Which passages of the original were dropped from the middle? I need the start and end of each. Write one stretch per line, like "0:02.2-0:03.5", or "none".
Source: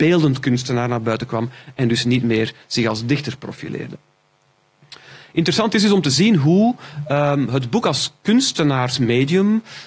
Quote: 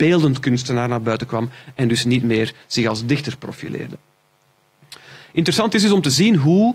none